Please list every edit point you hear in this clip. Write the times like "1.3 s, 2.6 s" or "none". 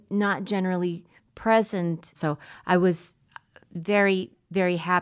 2.1 s

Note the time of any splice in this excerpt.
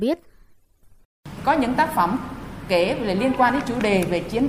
1.4 s

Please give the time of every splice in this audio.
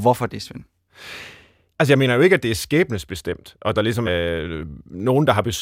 1.7 s, 4.1 s

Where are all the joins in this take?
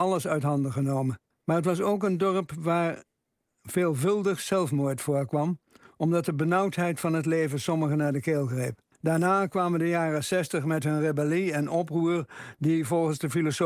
1.3 s, 8.9 s

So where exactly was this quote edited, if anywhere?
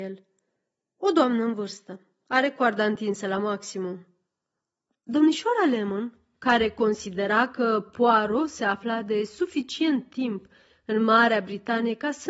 4.9 s

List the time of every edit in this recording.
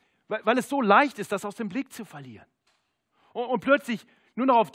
none

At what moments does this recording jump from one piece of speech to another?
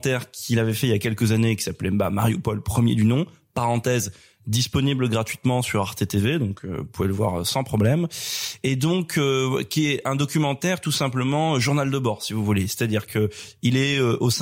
none

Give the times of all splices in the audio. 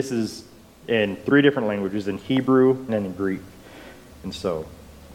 2.9 s, 4.1 s

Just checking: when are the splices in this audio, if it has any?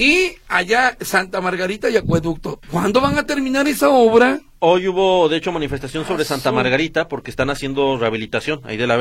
2.6 s

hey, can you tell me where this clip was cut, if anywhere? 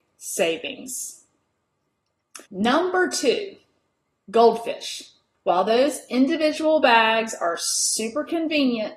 2.5 s, 5.3 s

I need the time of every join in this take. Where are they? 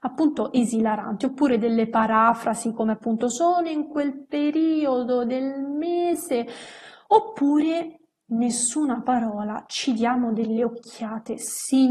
none

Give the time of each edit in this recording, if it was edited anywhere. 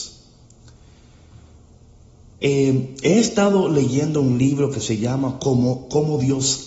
2.4 s

